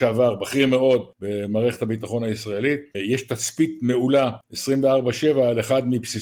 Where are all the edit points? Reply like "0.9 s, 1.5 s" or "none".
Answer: 2.9 s